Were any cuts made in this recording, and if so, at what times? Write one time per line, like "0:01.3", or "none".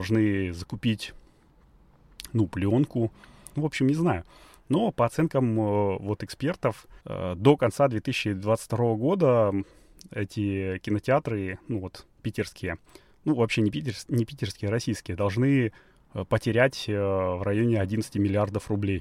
0:03.5
0:07.0